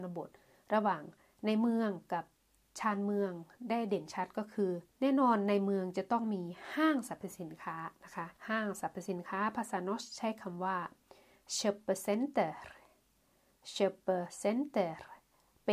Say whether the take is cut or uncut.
cut